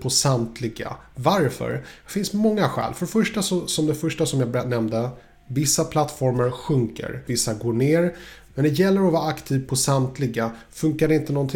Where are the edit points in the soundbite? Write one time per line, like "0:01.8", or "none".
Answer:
0:07.3